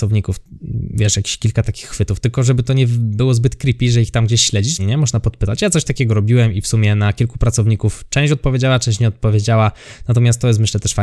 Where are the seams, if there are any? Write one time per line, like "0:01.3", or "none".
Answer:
0:04.8